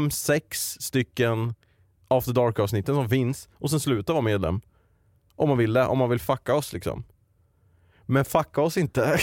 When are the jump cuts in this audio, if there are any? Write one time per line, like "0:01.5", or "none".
none

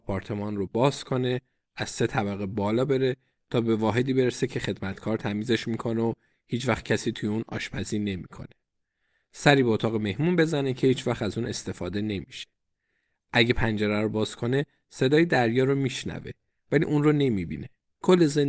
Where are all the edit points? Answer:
none

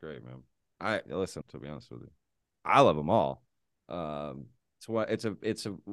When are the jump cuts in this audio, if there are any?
0:01.4

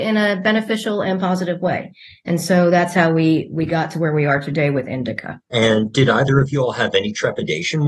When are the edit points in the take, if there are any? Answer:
0:05.4

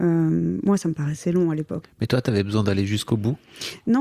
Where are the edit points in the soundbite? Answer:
0:01.8

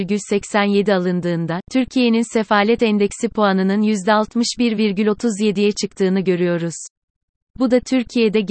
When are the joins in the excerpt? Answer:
none

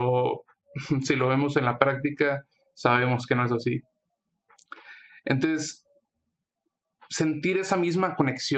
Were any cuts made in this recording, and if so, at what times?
none

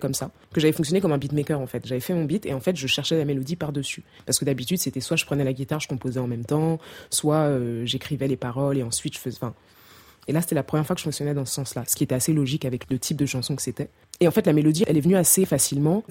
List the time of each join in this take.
none

